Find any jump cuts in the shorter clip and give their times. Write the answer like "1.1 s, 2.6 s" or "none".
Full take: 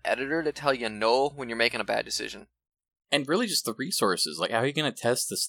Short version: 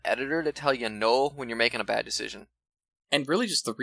none